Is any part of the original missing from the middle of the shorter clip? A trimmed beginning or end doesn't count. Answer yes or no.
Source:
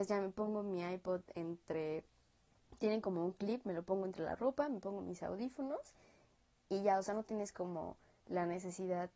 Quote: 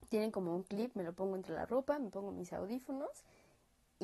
no